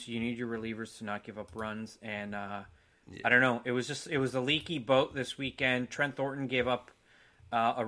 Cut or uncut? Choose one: uncut